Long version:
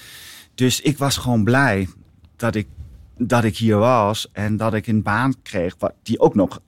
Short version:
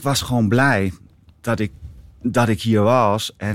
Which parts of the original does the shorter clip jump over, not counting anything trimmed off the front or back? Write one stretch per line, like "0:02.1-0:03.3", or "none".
none